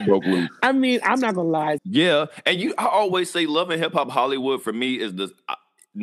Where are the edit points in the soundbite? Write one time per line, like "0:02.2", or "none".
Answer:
0:01.8